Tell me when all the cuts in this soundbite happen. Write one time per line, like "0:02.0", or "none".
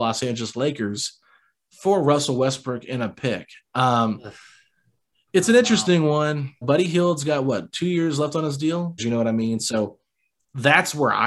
0:06.6
0:09.0